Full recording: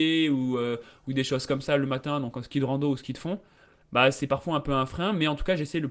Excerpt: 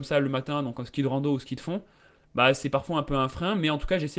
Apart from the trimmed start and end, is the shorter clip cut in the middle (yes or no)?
no